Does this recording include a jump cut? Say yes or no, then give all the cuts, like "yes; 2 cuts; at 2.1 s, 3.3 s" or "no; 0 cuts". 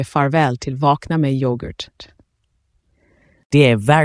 no; 0 cuts